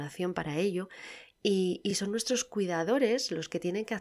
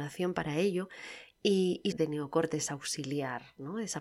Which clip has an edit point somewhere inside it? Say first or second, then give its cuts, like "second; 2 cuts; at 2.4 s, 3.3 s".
second; 1 cut; at 1.9 s